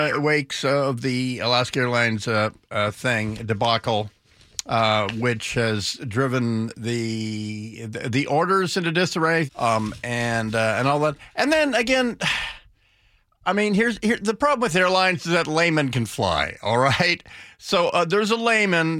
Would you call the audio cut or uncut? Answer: cut